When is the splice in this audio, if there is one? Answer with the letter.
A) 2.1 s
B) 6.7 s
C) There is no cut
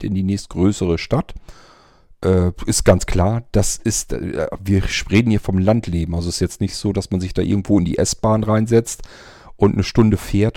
C